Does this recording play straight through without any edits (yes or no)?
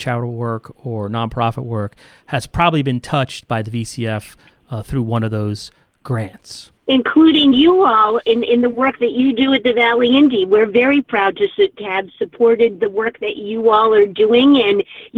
no